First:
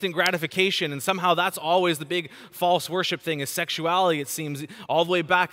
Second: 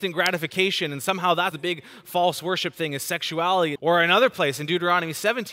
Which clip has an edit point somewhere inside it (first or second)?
second